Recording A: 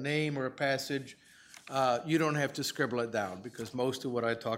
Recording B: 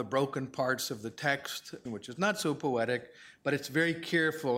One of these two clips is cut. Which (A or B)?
B